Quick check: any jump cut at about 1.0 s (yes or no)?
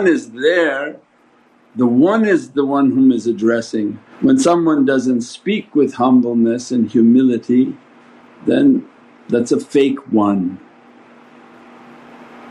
no